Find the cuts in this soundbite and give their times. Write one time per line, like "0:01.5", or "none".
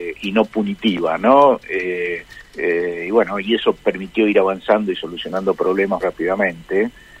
0:02.4
0:06.0